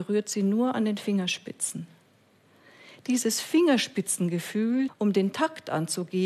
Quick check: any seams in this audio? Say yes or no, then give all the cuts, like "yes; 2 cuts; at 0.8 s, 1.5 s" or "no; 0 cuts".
yes; 1 cut; at 4.9 s